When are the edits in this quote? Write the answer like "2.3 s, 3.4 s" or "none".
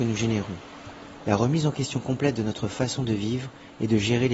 none